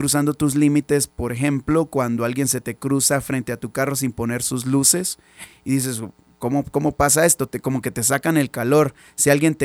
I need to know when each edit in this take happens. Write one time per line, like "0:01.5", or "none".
none